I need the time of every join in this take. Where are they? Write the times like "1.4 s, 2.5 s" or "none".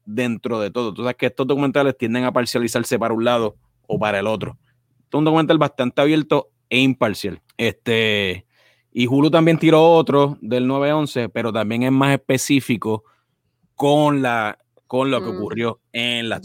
7.5 s